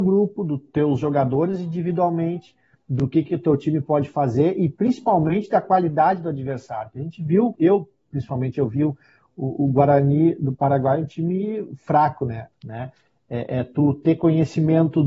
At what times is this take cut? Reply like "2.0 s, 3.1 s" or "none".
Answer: 7.6 s, 12.5 s

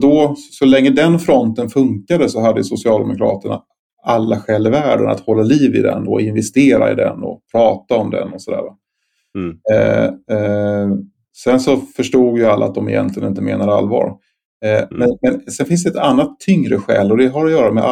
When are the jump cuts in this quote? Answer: none

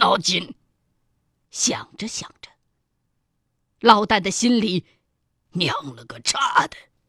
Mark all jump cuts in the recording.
1.5 s, 5.5 s

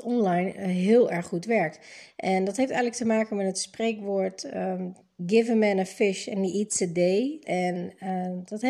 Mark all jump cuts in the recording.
5.2 s, 7.4 s

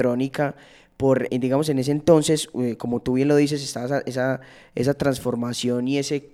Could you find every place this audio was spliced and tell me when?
1.3 s

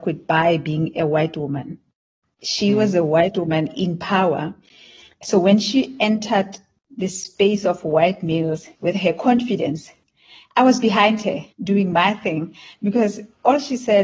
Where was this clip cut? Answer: 8.7 s, 11.5 s

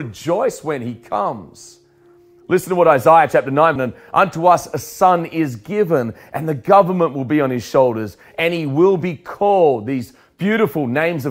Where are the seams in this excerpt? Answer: 3.8 s

